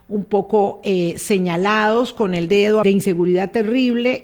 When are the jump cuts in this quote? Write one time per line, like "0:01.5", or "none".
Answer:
0:02.8

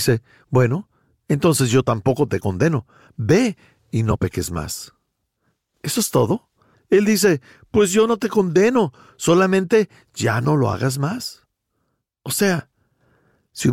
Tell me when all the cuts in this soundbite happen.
0:06.7

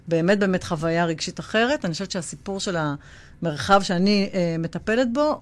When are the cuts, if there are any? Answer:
none

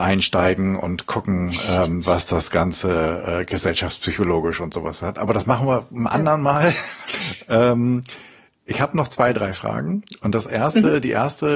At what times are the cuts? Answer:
0:07.1

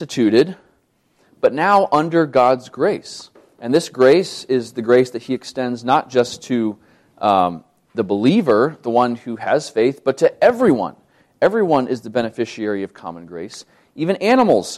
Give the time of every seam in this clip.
none

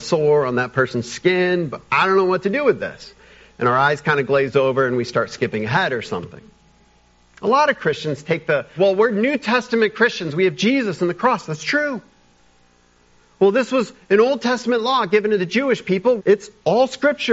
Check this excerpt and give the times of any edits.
0:08.8
0:16.2

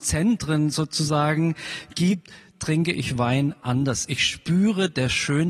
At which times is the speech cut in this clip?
none

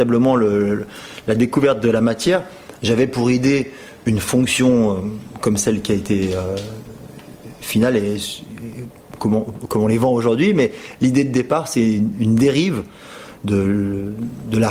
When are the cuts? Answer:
none

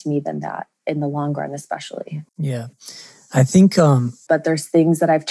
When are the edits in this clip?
0:02.3
0:04.3

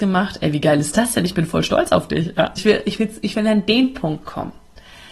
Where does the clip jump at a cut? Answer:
0:02.6

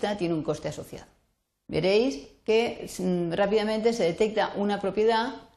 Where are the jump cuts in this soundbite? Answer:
0:01.6

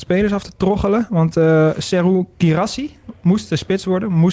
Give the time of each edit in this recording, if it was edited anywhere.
none

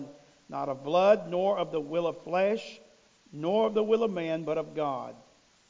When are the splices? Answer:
none

